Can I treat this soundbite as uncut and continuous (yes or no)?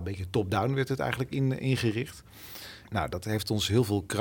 no